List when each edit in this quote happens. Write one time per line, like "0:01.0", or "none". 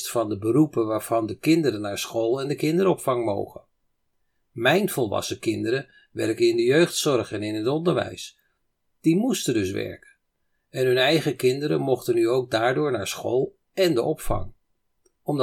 none